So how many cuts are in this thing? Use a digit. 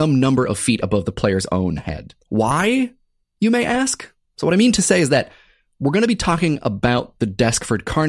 1